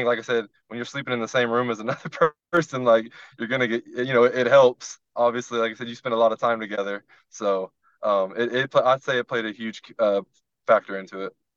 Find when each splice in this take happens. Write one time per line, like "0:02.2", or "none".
none